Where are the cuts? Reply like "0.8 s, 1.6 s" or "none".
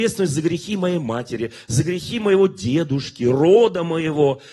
1.6 s, 3.2 s